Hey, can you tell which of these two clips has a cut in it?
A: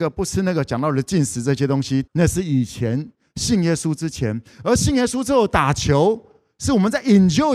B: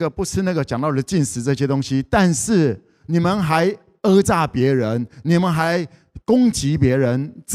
A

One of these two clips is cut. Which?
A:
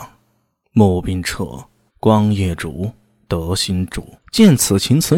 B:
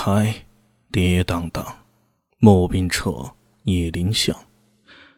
A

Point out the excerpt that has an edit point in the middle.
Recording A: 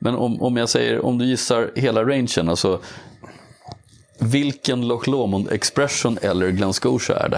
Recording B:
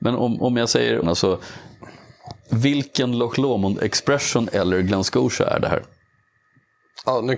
B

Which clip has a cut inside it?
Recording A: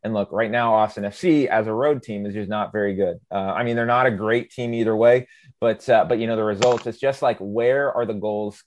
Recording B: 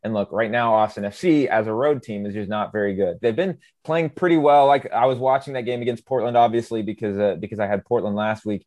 B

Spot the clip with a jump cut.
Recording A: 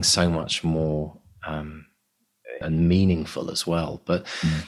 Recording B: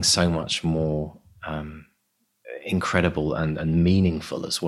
A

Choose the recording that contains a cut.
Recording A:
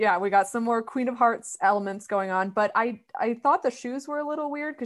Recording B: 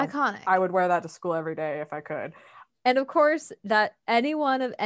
B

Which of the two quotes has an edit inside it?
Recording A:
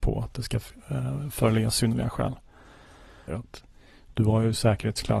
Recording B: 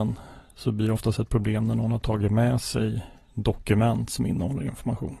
A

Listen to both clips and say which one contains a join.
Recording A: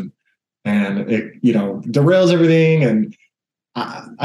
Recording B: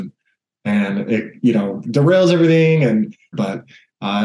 B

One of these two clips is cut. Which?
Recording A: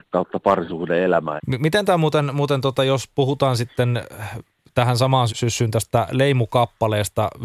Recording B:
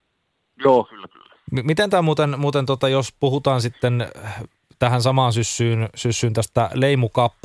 A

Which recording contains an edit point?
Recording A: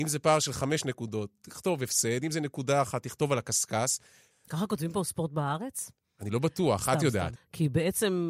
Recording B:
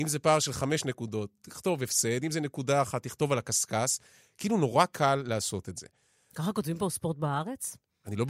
A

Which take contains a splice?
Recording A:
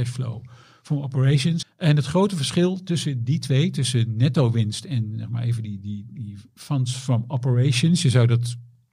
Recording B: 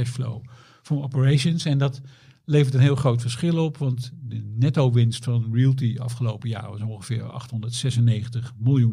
A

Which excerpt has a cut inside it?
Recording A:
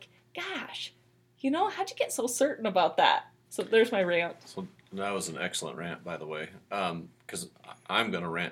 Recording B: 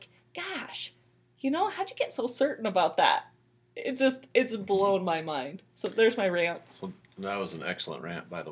A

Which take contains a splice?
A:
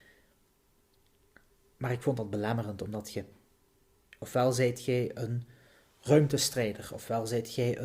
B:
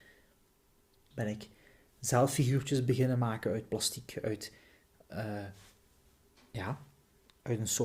B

